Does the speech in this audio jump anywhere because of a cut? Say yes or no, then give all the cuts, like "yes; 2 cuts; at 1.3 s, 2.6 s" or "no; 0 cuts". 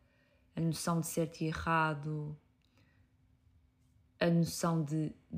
no; 0 cuts